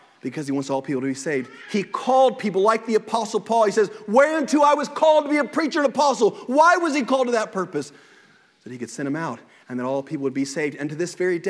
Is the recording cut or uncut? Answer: uncut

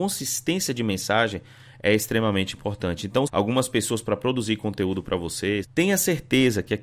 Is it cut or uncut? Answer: cut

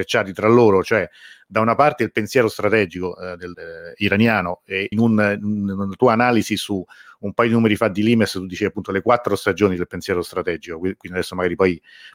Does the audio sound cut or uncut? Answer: cut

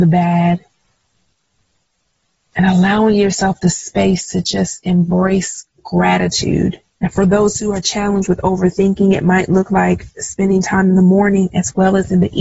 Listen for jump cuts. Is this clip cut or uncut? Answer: cut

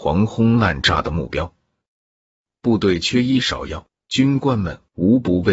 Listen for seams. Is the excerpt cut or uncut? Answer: cut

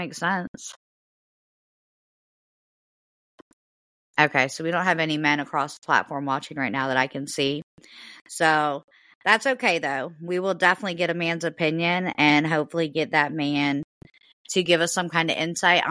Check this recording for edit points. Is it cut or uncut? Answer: uncut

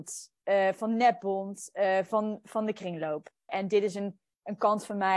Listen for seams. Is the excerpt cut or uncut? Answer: cut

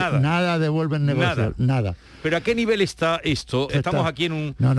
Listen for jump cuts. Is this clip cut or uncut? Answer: cut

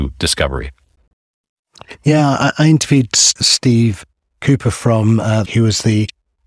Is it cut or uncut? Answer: cut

